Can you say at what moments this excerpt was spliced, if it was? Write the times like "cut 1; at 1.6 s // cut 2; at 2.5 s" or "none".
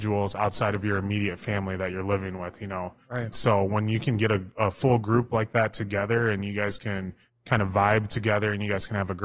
cut 1; at 3.3 s